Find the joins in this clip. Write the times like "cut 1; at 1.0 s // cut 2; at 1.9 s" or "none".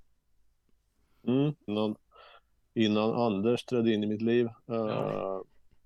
cut 1; at 1.7 s